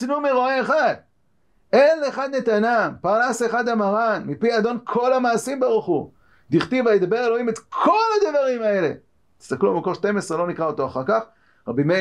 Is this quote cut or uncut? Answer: uncut